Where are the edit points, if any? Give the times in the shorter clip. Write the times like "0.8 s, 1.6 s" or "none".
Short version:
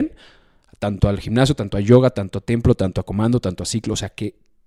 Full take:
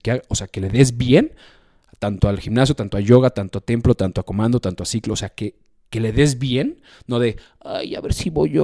none